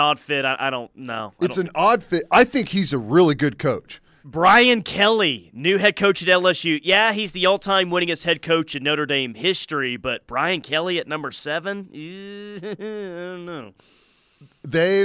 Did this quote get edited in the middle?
yes; 1 cut; at 4.2 s

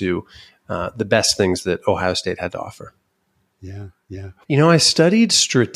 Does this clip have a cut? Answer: yes; 1 cut; at 4.4 s

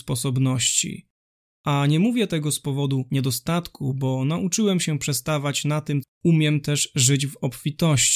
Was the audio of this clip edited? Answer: yes; 1 cut; at 6.0 s

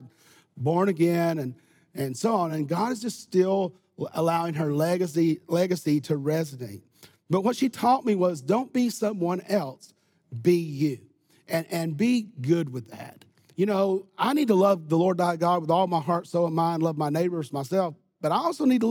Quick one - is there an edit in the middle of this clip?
no; 0 cuts

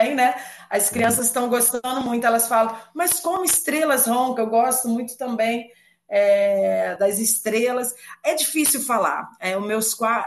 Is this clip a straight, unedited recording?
yes; 0 cuts

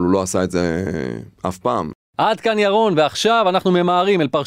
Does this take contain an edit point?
no; 0 cuts

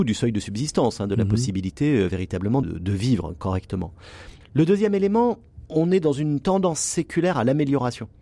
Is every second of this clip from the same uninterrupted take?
no; 3 cuts; at 2.6 s, 4.4 s, 5.7 s

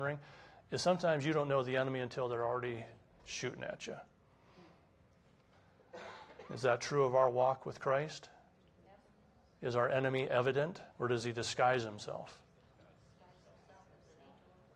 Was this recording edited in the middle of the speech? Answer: yes; 1 cut; at 10.9 s

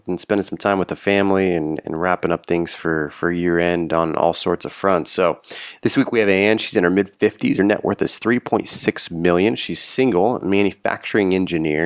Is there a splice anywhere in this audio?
no; 0 cuts

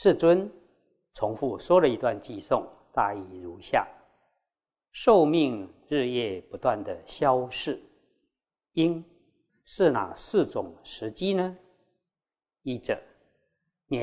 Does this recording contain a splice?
yes; 1 cut; at 9.5 s

